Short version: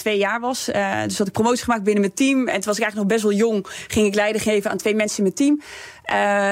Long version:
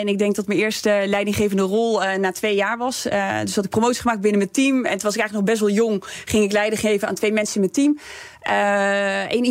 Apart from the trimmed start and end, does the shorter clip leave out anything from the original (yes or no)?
no